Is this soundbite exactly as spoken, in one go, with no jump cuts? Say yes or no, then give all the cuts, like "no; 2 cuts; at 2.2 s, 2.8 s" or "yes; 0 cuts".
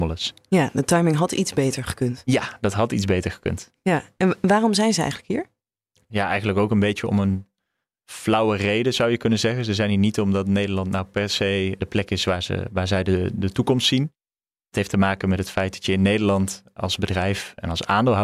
yes; 0 cuts